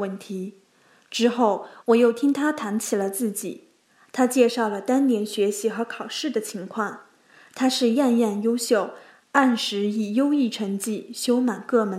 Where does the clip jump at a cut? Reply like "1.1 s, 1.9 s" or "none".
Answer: none